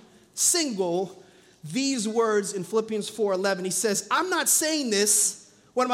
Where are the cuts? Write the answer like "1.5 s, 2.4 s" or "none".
none